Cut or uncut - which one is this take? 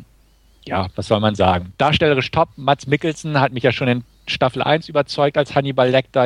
uncut